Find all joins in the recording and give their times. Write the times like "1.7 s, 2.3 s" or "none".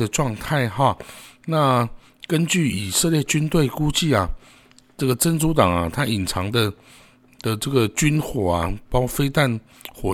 none